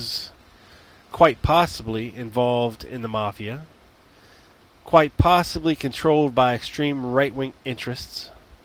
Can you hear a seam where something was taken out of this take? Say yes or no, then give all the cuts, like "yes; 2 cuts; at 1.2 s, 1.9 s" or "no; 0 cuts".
no; 0 cuts